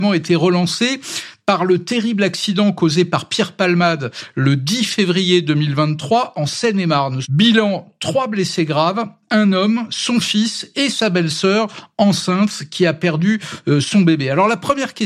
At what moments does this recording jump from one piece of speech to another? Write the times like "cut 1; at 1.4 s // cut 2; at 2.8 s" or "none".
cut 1; at 7.2 s